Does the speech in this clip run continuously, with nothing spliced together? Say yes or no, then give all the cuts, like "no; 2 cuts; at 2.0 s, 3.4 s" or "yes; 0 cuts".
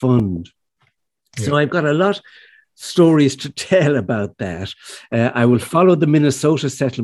yes; 0 cuts